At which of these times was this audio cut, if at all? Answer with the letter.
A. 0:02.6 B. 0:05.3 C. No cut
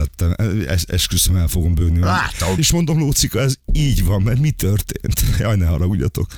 A